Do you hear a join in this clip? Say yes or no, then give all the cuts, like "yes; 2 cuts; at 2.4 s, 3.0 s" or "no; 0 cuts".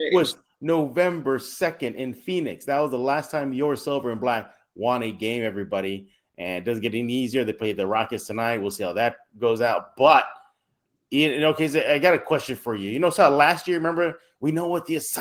no; 0 cuts